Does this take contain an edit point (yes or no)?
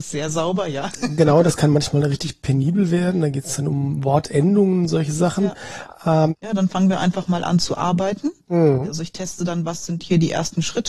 yes